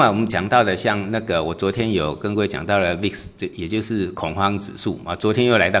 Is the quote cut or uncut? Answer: uncut